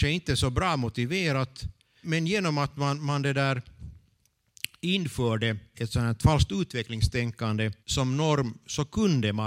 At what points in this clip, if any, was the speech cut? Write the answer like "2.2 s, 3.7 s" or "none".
2.0 s, 5.7 s, 7.8 s